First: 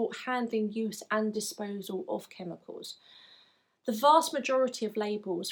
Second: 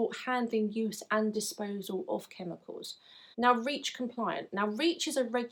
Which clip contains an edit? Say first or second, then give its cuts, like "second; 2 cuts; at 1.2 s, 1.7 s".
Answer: second; 1 cut; at 3.3 s